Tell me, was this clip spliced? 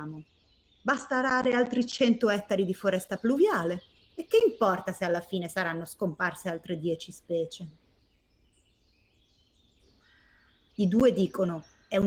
yes; 1 cut; at 10.7 s

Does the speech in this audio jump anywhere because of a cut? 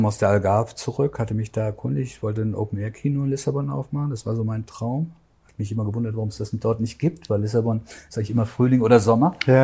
no; 0 cuts

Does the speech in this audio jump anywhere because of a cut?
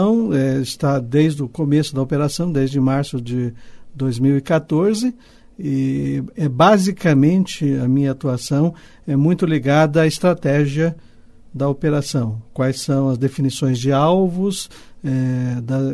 no; 0 cuts

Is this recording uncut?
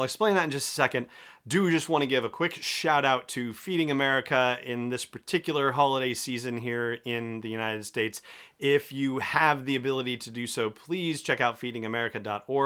yes; 0 cuts

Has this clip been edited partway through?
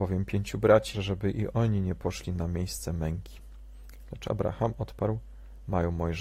yes; 1 cut; at 0.9 s

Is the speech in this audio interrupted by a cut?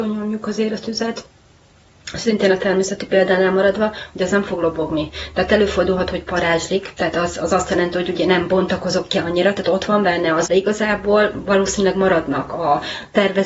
yes; 1 cut; at 10.5 s

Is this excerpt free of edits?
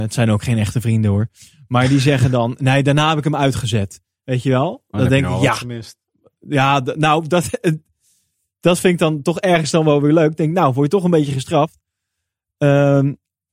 yes; 0 cuts

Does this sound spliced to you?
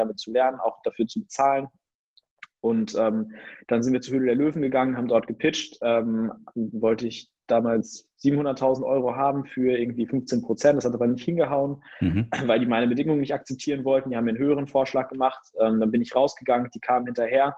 no; 0 cuts

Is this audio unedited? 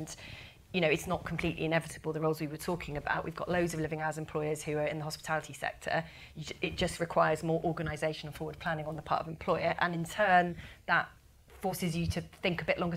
yes; 0 cuts

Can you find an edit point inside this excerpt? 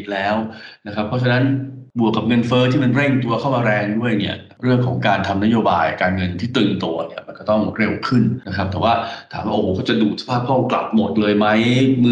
no; 0 cuts

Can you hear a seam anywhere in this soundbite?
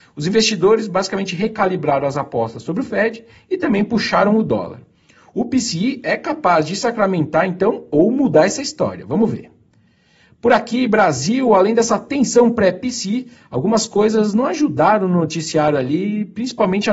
no; 0 cuts

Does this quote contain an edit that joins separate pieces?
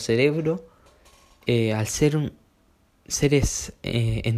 no; 0 cuts

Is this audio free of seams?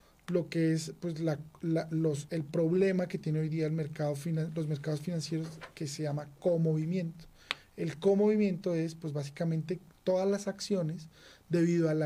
yes; 0 cuts

